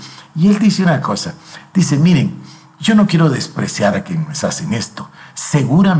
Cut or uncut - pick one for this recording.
uncut